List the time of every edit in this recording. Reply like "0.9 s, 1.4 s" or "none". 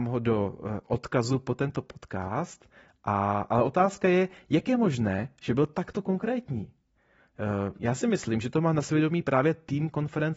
none

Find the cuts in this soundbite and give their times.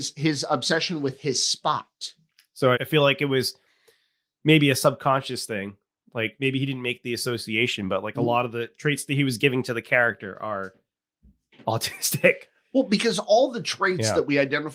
2.7 s

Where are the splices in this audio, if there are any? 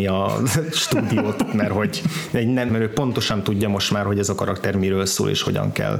2.7 s

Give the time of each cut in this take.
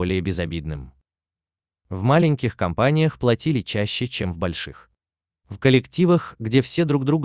none

